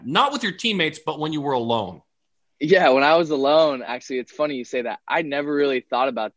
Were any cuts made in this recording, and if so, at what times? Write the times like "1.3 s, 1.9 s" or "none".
none